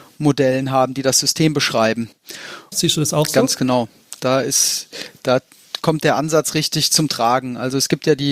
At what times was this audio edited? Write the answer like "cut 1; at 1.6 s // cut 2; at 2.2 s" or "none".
cut 1; at 2.7 s

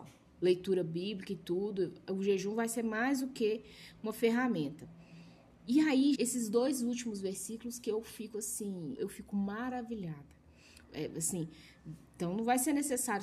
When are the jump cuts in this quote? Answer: cut 1; at 6.1 s // cut 2; at 9.0 s // cut 3; at 10.8 s

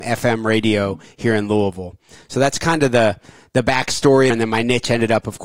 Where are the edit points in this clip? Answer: cut 1; at 4.3 s

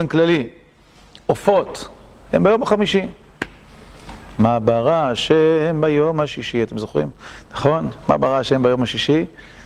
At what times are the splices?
none

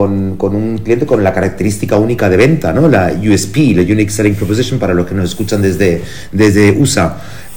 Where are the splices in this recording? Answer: none

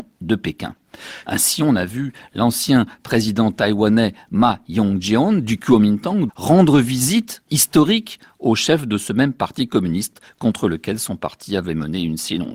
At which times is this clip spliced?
cut 1; at 1.2 s // cut 2; at 6.3 s

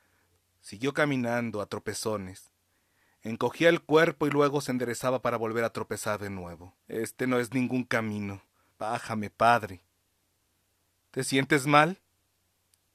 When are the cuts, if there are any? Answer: cut 1; at 6.8 s // cut 2; at 8.7 s

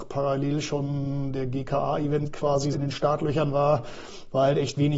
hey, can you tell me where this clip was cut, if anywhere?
cut 1; at 2.7 s

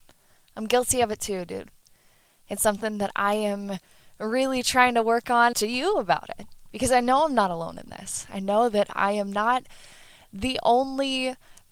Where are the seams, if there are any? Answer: cut 1; at 5.5 s

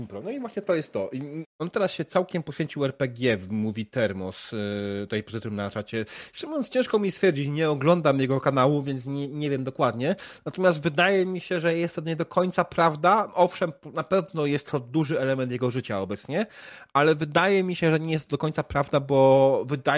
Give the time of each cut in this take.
cut 1; at 1.4 s

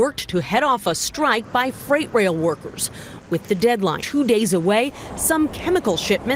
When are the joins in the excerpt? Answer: cut 1; at 4.0 s

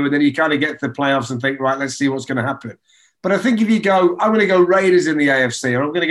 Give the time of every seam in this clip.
none

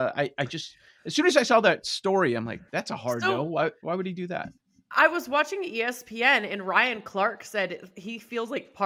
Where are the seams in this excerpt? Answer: cut 1; at 2.7 s

